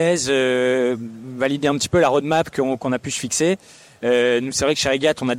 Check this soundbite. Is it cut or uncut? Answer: uncut